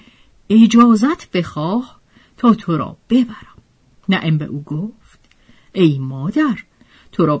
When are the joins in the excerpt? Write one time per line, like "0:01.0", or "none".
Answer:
0:04.0